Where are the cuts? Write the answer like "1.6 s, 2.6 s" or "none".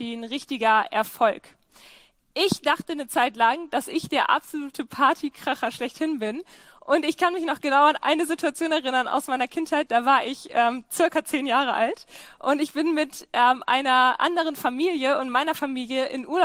none